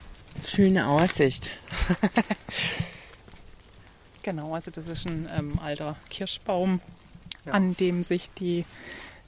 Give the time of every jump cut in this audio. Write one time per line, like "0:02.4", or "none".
none